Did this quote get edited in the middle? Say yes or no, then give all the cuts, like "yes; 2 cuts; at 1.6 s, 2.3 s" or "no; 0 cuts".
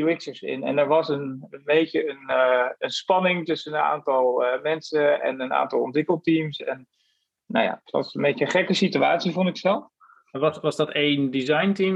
no; 0 cuts